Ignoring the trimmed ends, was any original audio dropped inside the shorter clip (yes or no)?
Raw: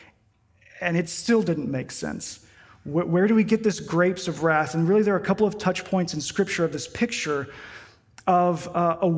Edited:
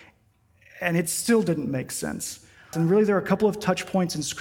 yes